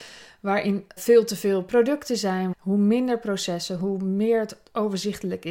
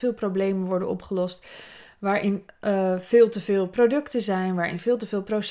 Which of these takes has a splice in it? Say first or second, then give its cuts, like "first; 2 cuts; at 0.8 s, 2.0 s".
first; 2 cuts; at 1.0 s, 2.5 s